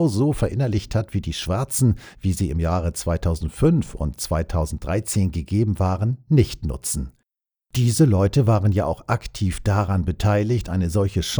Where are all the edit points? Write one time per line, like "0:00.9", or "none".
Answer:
0:02.1